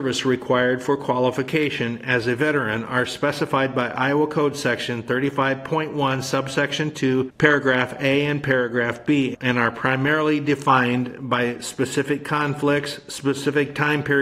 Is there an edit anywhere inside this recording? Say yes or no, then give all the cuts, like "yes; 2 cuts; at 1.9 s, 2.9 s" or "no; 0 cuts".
no; 0 cuts